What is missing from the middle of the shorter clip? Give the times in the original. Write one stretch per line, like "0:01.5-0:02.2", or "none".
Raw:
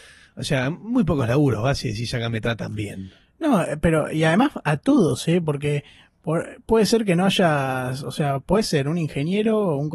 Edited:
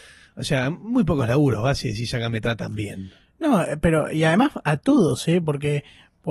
none